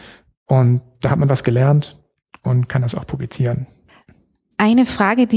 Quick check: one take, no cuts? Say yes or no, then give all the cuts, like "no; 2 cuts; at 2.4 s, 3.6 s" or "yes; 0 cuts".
no; 1 cut; at 0.9 s